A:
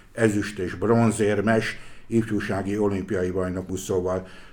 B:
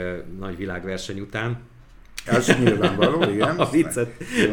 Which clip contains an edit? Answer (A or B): B